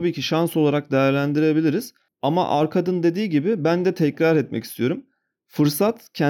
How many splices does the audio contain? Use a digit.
0